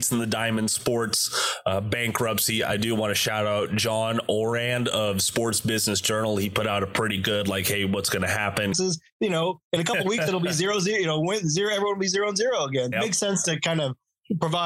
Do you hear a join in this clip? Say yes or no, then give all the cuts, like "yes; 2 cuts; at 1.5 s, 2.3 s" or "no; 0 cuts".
yes; 2 cuts; at 8.7 s, 12.9 s